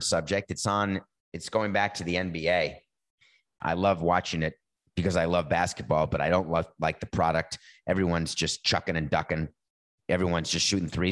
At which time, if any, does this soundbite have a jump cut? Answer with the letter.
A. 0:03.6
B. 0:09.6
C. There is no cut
A